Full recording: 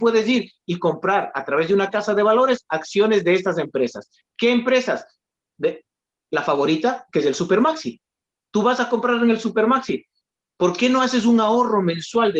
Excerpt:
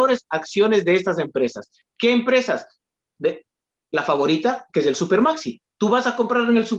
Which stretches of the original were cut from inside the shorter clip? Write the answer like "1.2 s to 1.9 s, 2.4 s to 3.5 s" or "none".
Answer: 8.1 s to 8.4 s

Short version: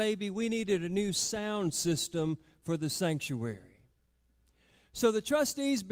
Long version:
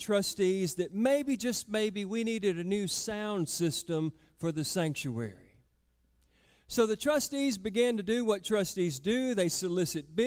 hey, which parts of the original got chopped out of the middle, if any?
none

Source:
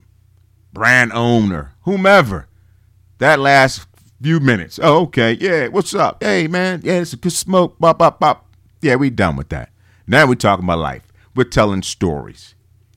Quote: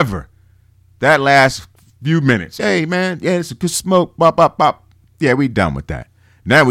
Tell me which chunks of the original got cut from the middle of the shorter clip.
4.8 s to 6.2 s

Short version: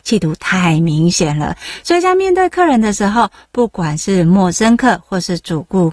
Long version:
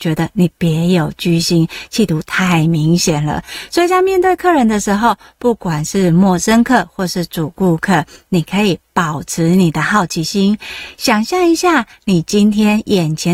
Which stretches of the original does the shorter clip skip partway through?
none

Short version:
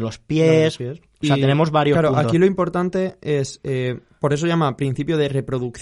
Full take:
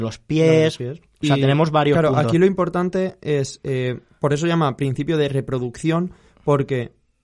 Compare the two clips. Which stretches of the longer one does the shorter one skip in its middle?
none

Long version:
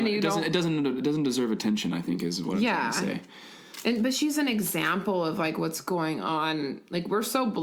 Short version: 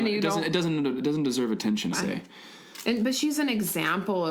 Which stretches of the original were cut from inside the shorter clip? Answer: 1.9 s to 2.9 s

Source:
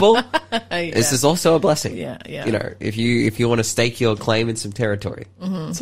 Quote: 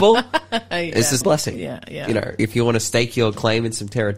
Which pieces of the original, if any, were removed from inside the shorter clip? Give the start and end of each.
1.2 s to 1.6 s, 2.8 s to 3.2 s

